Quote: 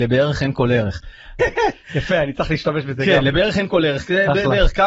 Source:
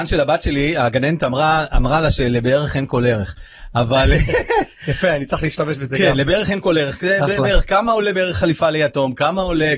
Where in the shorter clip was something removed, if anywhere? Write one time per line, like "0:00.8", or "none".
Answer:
0:01.4